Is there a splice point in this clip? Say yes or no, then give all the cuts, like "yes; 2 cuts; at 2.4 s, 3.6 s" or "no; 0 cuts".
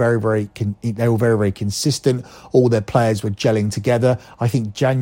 no; 0 cuts